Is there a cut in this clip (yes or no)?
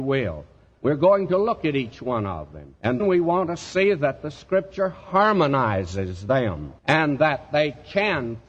yes